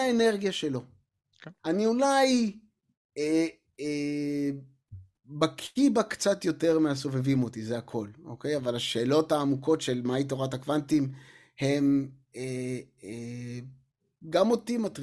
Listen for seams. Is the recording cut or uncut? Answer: cut